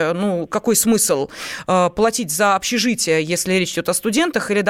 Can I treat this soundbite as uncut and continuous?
yes; 0 cuts

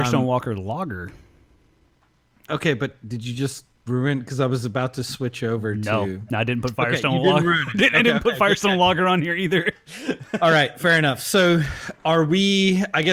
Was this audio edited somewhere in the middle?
no; 0 cuts

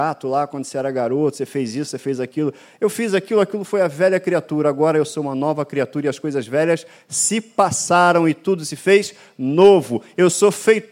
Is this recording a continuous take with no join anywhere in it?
yes; 0 cuts

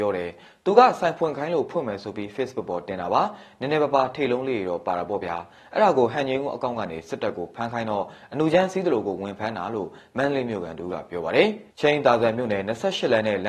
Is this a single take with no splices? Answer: no; 1 cut; at 11.7 s

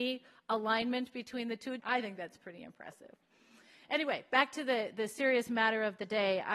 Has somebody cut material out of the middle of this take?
yes; 1 cut; at 1.8 s

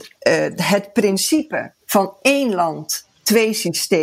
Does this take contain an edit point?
yes; 1 cut; at 1.8 s

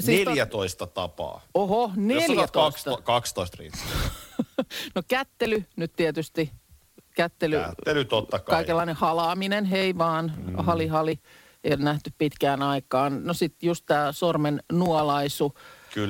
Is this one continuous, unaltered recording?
yes; 0 cuts

